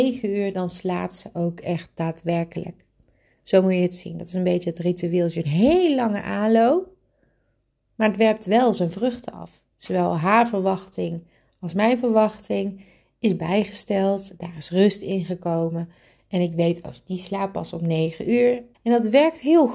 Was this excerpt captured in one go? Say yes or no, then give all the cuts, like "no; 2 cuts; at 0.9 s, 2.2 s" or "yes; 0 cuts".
no; 2 cuts; at 9.7 s, 18.7 s